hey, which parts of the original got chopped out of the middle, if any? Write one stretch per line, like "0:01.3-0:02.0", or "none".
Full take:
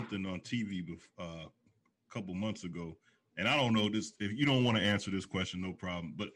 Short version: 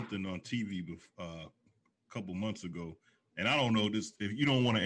none

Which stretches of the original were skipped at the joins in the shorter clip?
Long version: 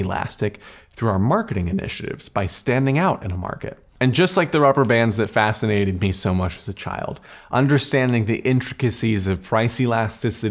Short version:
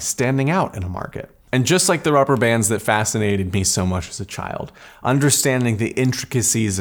none

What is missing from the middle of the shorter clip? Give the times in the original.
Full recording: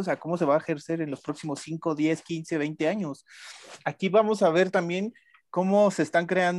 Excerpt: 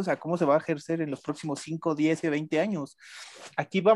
0:02.2-0:02.5

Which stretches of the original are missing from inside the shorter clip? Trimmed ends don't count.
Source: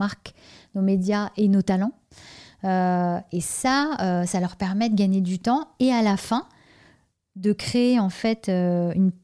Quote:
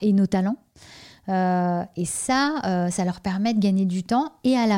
none

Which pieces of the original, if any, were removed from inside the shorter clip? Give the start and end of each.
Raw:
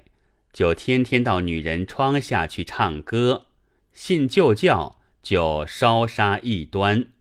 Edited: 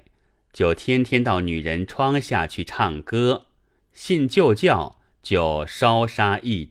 none

